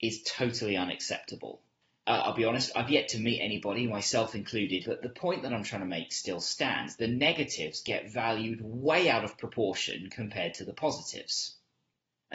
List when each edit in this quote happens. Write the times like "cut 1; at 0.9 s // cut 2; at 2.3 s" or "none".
cut 1; at 2.0 s // cut 2; at 4.8 s